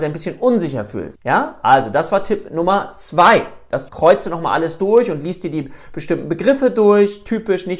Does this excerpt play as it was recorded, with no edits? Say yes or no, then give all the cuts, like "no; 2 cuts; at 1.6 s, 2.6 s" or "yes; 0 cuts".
no; 2 cuts; at 1.2 s, 3.9 s